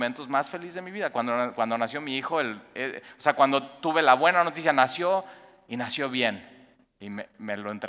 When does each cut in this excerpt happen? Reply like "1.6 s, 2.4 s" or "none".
none